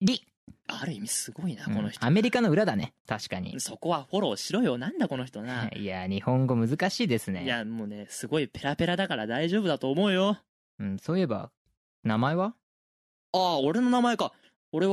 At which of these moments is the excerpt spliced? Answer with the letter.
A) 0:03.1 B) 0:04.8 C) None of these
A